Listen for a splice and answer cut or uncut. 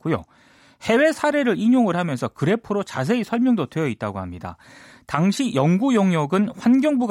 uncut